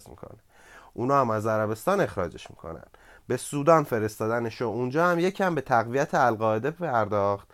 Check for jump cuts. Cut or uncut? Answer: uncut